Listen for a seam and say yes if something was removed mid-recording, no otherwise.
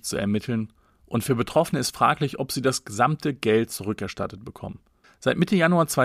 yes